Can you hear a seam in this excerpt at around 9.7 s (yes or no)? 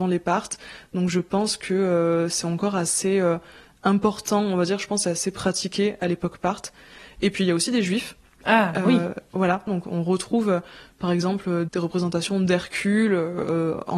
yes